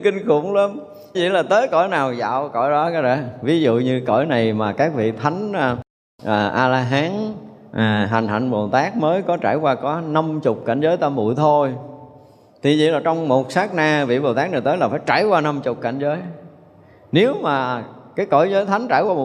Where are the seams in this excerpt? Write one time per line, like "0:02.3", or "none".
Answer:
0:01.1